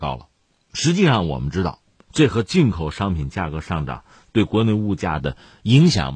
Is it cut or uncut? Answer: uncut